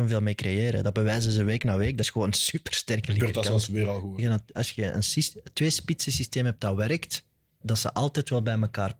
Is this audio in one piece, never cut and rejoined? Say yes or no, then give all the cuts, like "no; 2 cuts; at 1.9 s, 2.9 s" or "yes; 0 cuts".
no; 2 cuts; at 4.2 s, 7.6 s